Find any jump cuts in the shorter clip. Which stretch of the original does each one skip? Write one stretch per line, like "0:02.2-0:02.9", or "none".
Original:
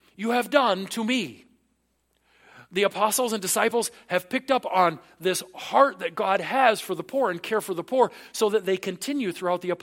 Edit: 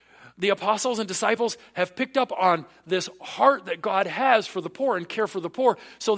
none